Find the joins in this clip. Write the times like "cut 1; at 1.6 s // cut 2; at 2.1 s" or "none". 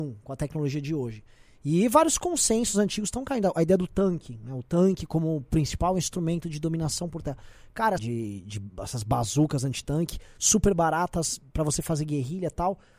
cut 1; at 8.0 s